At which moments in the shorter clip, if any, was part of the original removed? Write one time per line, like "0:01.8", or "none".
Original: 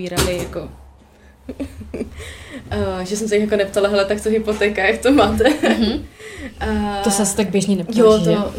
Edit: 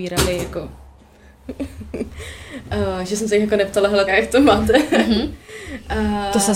0:04.1